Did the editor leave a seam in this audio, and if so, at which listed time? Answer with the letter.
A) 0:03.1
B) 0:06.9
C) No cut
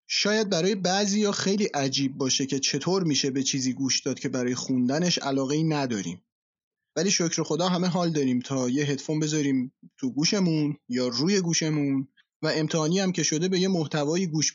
B